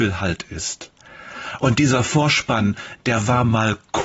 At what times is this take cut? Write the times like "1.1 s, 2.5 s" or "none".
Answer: none